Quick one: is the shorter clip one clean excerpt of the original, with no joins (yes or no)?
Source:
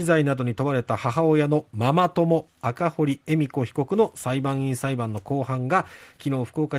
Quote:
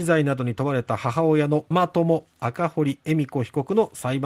no